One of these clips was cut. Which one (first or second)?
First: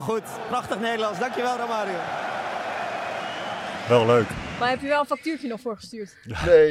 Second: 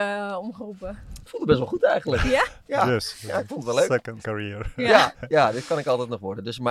second